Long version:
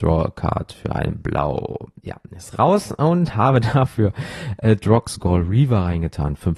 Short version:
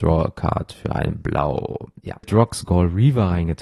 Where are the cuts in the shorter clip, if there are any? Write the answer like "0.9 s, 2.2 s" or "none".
2.2 s